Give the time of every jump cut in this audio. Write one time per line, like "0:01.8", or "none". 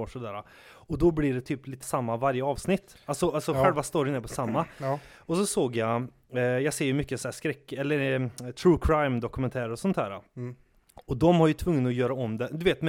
0:01.8